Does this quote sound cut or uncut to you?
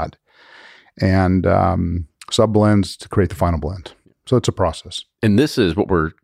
uncut